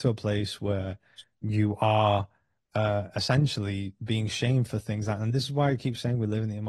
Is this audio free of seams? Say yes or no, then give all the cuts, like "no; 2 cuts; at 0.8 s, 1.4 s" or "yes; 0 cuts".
yes; 0 cuts